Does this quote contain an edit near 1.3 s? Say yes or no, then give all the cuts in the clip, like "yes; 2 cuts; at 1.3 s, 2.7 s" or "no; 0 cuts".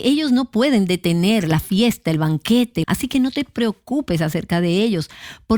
no; 1 cut; at 2.8 s